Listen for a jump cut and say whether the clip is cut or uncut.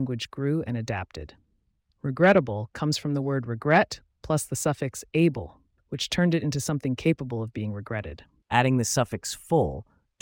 cut